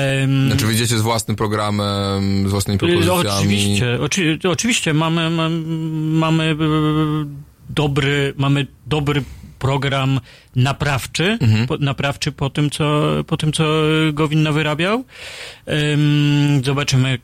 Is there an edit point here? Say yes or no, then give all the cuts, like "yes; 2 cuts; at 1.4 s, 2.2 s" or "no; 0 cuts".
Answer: no; 0 cuts